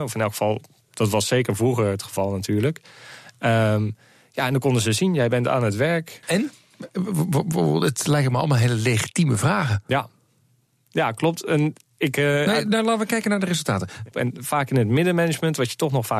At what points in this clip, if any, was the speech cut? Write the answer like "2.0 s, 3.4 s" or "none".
6.2 s, 14.1 s